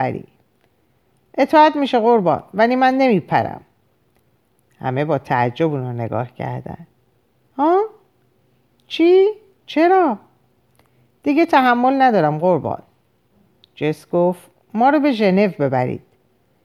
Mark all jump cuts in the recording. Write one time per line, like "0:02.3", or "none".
0:09.6